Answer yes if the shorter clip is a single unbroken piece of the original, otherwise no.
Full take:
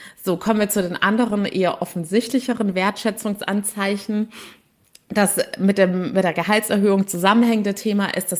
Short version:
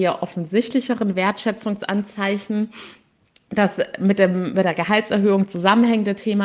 yes